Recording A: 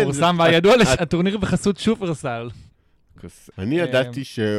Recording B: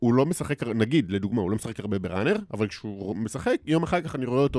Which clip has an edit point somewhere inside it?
A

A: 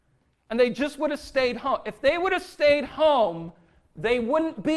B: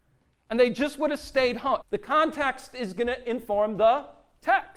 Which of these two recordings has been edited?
B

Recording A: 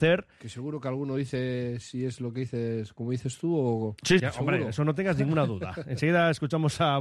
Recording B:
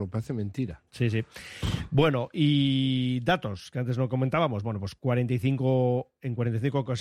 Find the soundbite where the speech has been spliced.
A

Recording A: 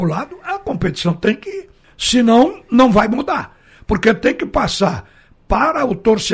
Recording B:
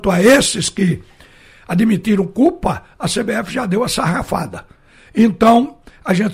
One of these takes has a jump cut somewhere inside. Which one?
A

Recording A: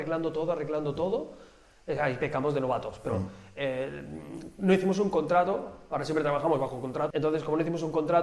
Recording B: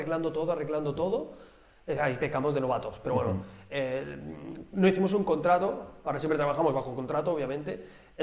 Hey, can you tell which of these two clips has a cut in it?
A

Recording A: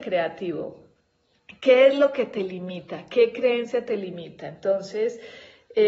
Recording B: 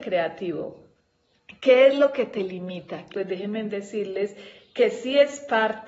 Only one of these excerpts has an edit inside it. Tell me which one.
B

